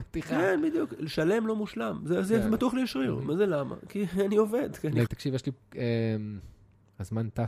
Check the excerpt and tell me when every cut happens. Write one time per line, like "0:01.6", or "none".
0:05.1

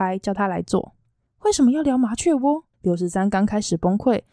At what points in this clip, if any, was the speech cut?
0:01.3
0:02.7

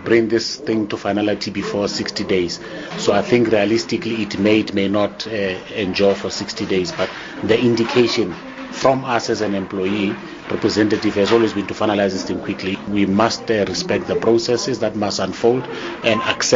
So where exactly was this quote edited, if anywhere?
0:02.9

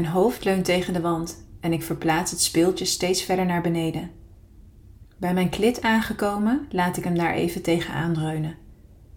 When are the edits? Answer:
0:05.0

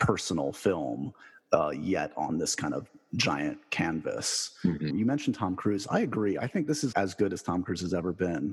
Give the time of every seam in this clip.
0:04.9
0:06.9

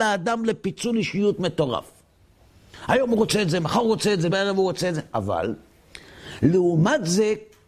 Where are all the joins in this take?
0:04.3

